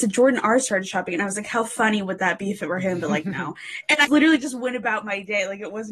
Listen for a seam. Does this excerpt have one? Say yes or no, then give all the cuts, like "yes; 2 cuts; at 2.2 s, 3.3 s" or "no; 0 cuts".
yes; 1 cut; at 4.1 s